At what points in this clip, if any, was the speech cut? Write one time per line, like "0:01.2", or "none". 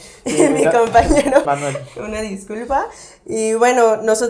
0:01.4